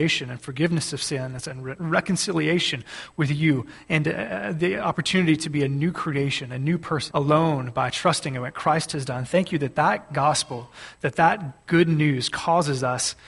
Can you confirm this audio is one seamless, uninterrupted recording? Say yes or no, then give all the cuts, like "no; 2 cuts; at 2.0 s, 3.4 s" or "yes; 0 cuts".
no; 1 cut; at 7.1 s